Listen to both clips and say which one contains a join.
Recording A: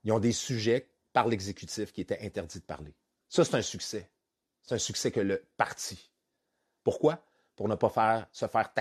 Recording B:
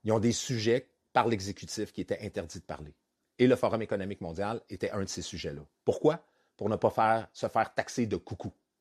A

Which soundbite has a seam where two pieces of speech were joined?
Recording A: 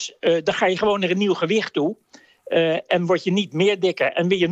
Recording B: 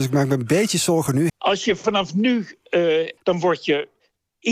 B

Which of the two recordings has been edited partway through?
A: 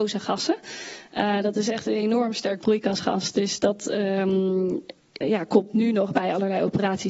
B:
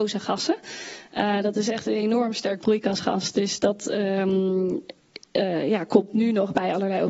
A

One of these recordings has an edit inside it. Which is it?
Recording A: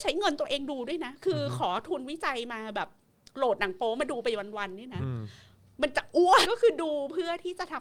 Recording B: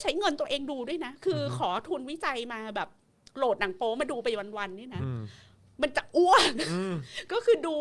A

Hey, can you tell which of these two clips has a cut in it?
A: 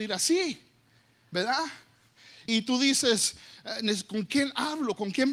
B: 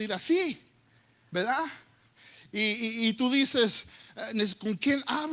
A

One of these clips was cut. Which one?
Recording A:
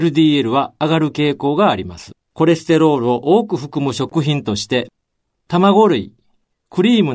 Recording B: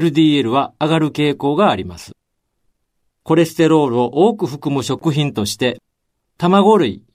A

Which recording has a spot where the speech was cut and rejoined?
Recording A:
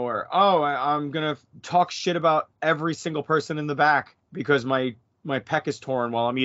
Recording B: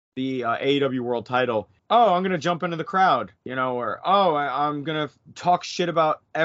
B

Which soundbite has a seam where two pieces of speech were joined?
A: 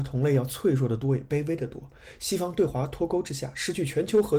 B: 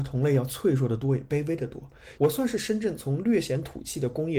B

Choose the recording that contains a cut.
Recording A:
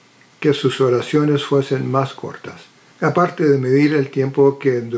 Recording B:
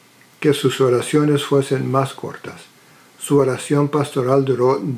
A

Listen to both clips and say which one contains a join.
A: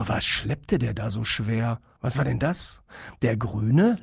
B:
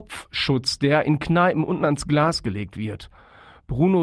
A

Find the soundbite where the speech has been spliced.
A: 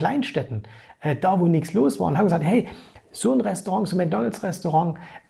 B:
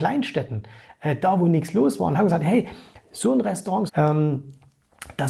B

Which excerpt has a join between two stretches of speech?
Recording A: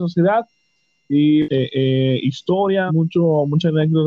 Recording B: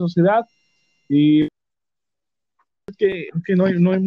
A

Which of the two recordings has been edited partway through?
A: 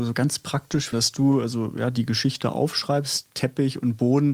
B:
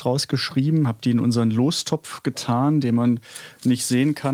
A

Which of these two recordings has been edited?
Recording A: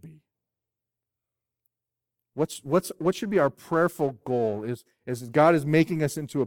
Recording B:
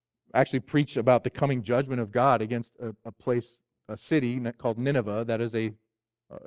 A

